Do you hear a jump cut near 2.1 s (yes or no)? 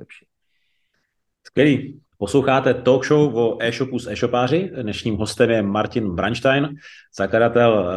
yes